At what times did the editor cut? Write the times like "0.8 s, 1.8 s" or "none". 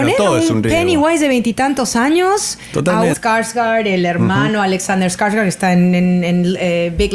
3.1 s